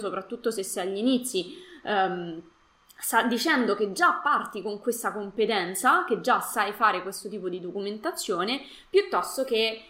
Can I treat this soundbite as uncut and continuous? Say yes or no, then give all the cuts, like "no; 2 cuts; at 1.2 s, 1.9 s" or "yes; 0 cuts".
yes; 0 cuts